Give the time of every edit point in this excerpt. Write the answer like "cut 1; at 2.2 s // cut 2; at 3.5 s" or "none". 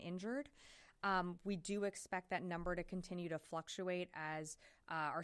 none